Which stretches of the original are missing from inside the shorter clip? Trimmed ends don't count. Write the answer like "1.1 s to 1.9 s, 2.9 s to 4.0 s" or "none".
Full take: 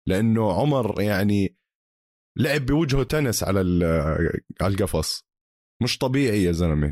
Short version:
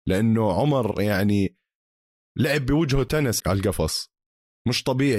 3.4 s to 4.5 s